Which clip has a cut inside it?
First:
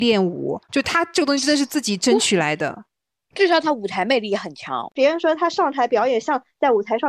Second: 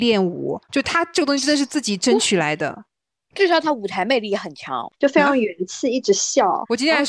second; 1 cut; at 4.9 s

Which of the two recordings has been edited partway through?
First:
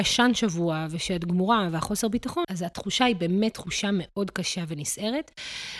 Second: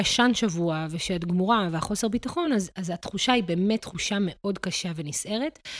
first; 1 cut; at 2.4 s

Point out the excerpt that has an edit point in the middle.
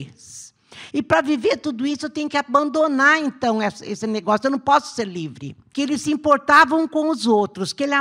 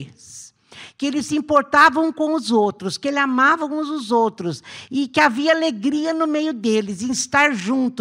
first; 2 cuts; at 0.9 s, 5.7 s

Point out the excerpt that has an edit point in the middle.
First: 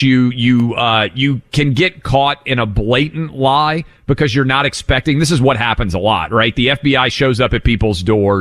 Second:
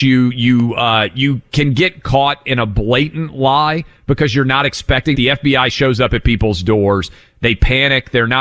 second; 1 cut; at 5.1 s

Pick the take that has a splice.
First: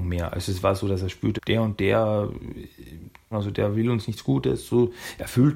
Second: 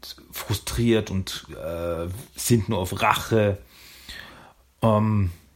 first; 2 cuts; at 1.4 s, 3.3 s

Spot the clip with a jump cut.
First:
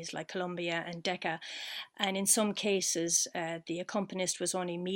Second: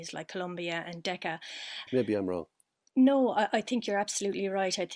second; 1 cut; at 1.9 s

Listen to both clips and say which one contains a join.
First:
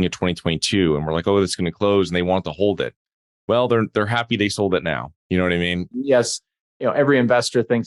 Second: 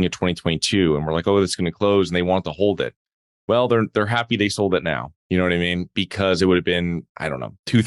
first; 1 cut; at 5.9 s

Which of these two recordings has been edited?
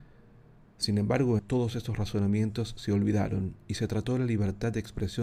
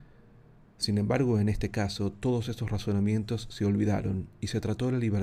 first; 1 cut; at 1.4 s

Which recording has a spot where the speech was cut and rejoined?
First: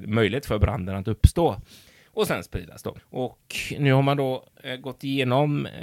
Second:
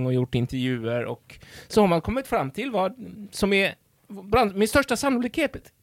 first; 1 cut; at 3.0 s

